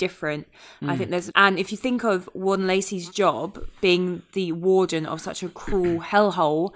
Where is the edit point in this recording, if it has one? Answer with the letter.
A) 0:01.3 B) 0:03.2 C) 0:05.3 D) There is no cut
A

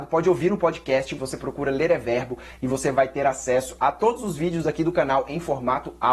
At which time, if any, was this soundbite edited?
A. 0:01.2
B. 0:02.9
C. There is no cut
A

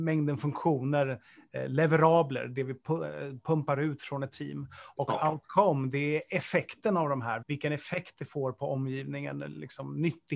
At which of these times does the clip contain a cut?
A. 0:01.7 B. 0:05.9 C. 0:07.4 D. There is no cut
C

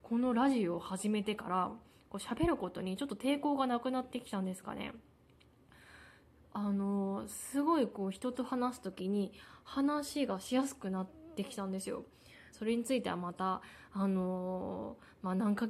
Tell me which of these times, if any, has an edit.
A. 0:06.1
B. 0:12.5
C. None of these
B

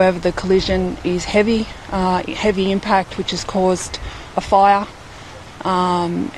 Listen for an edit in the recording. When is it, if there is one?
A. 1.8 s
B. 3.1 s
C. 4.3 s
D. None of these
C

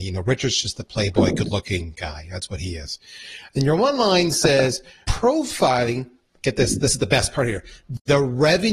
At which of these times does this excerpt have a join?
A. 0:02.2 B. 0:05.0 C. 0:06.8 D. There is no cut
B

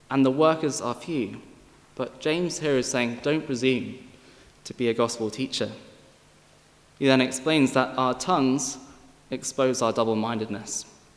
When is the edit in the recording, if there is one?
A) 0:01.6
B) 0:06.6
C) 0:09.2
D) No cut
D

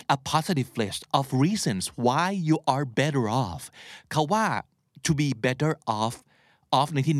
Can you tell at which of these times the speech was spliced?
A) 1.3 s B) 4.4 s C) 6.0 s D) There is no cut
D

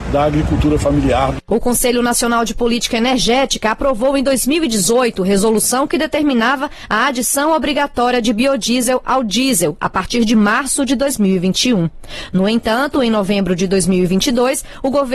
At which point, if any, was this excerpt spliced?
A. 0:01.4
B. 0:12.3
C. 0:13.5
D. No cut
D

